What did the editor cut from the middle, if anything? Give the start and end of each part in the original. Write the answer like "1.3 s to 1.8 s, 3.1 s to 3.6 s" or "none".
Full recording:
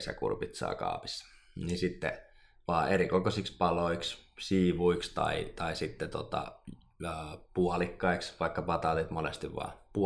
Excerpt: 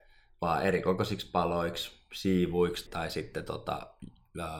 5.1 s to 5.5 s